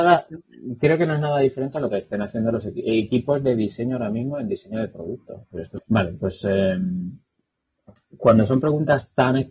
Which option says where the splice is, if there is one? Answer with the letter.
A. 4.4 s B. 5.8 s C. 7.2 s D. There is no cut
B